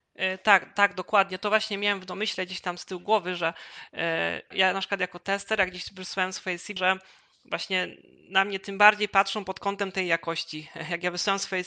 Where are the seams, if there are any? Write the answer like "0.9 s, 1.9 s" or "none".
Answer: 4.5 s, 6.8 s